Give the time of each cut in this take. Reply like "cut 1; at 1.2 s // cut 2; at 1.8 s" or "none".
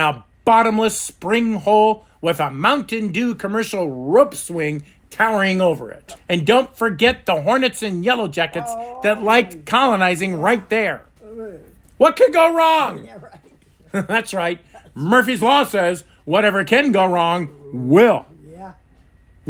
cut 1; at 6.2 s